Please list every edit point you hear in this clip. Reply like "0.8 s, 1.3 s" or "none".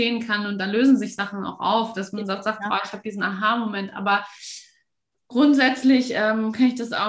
none